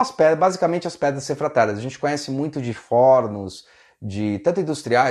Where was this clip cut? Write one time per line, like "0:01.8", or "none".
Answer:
none